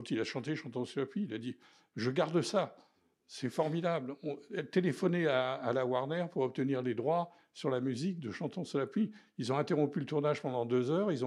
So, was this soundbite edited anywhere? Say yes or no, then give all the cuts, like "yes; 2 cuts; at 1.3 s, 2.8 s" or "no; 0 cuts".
no; 0 cuts